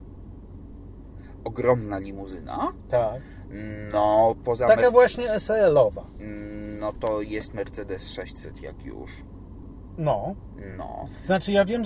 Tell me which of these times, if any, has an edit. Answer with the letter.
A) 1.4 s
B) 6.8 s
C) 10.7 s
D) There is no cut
D